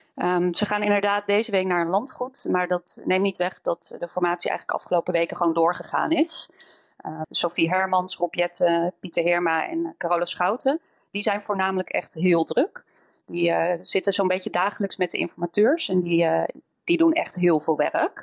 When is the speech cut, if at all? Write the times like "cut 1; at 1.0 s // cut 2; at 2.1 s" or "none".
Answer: cut 1; at 7.2 s